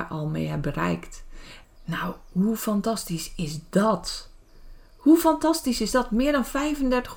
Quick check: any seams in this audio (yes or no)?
yes